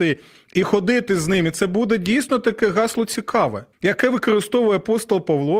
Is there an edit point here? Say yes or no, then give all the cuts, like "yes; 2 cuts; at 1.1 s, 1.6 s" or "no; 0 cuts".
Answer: yes; 1 cut; at 3.7 s